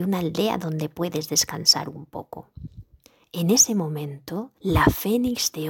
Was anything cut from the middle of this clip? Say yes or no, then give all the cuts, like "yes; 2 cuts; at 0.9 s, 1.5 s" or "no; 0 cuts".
yes; 1 cut; at 4.6 s